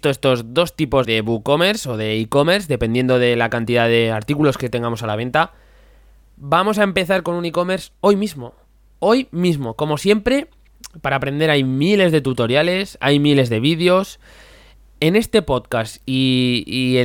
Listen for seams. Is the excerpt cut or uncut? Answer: cut